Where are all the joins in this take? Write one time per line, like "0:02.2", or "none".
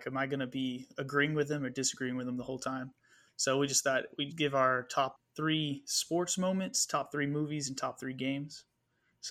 0:04.3